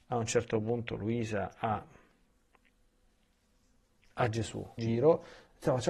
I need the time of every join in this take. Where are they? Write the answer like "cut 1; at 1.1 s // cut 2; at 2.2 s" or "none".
cut 1; at 4.8 s